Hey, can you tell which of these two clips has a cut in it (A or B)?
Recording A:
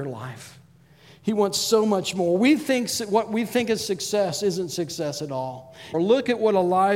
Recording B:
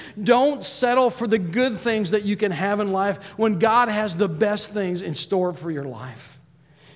A